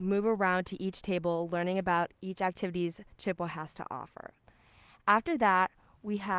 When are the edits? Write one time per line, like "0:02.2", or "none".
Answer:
none